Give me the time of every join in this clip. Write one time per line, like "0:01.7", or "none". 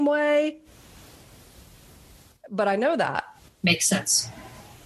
0:03.4